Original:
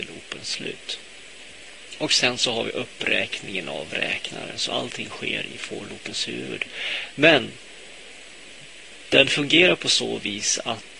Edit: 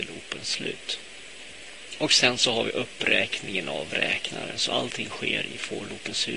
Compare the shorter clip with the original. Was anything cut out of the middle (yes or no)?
no